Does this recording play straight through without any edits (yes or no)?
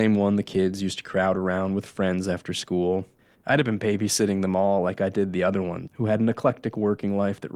no